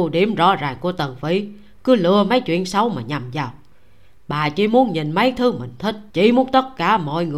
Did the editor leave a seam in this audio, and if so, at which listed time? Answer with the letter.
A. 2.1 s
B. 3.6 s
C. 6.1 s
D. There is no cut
C